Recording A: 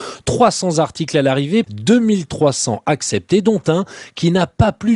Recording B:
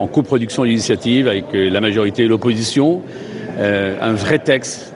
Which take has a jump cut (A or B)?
A